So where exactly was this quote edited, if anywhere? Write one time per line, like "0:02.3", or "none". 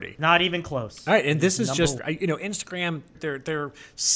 0:02.0
0:03.1